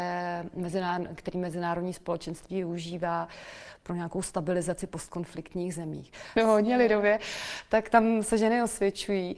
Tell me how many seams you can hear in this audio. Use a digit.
1